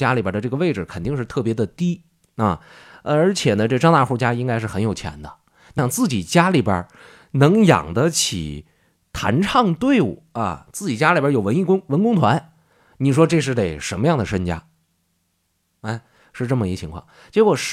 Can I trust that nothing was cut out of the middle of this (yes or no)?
no